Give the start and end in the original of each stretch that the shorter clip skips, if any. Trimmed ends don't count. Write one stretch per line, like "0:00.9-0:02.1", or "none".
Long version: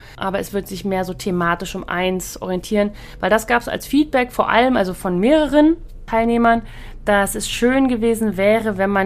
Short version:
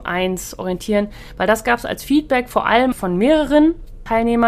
0:04.7-0:04.9